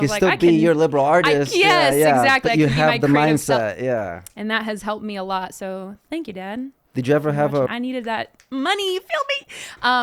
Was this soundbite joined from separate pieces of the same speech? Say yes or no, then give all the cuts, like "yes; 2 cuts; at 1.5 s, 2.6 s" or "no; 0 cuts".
yes; 1 cut; at 7.7 s